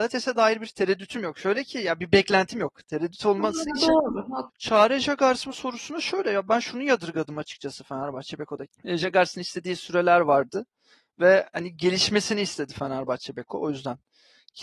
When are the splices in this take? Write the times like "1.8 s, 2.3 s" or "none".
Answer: 4.5 s, 8.7 s